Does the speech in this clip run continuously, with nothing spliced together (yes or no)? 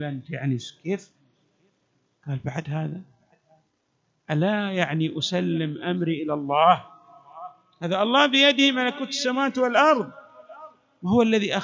yes